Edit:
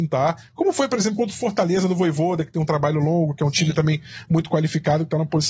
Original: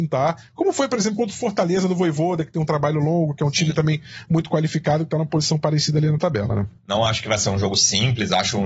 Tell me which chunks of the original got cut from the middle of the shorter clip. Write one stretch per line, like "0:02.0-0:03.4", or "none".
none